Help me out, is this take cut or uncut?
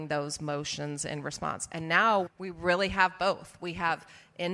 uncut